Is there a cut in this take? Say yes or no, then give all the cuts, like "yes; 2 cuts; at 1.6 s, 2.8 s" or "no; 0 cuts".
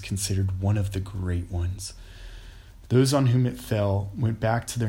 yes; 1 cut; at 2.9 s